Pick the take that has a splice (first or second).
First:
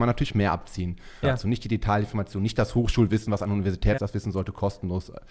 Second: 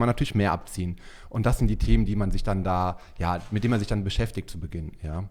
first